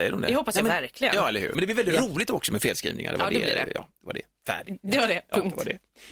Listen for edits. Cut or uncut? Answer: cut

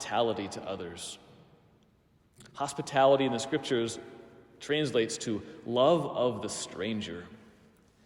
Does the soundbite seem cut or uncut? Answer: uncut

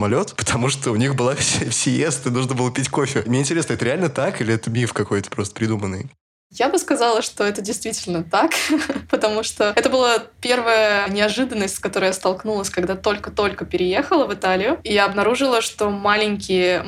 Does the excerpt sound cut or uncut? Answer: uncut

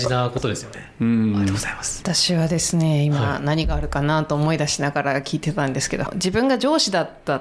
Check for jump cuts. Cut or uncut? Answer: cut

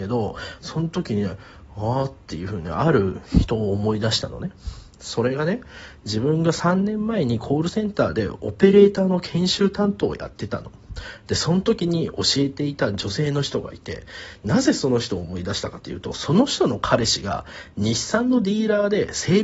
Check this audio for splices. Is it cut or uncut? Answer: uncut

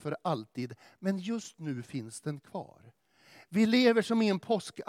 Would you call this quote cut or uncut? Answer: uncut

